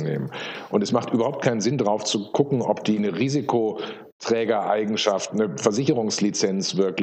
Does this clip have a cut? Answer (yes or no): no